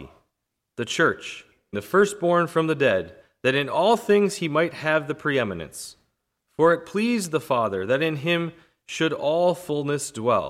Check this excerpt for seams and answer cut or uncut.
cut